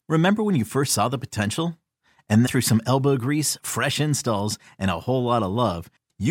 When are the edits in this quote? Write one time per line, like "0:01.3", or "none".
0:02.5